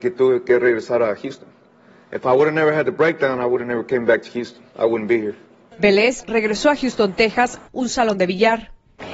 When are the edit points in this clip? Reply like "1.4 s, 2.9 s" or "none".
4.7 s, 6.2 s, 7.6 s